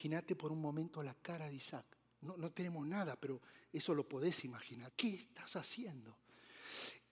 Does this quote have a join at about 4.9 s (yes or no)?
yes